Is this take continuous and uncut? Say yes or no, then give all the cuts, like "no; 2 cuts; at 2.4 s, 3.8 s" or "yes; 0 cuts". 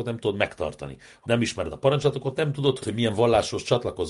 no; 2 cuts; at 1.2 s, 2.8 s